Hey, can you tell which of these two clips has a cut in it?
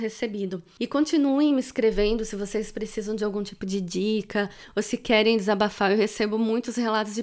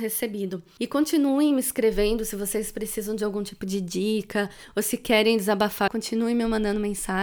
second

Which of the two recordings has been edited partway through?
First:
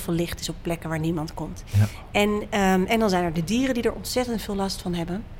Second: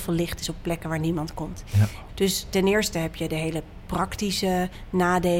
second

